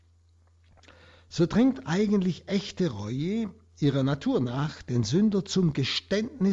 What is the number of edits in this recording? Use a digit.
0